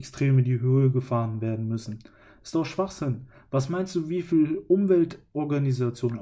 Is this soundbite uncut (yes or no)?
yes